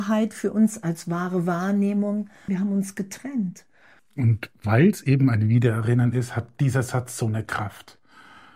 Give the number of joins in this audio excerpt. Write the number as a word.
two